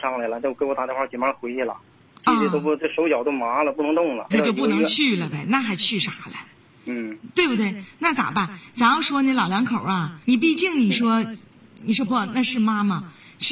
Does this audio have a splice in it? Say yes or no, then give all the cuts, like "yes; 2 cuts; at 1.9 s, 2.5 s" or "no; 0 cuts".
yes; 3 cuts; at 4.3 s, 10.2 s, 12.1 s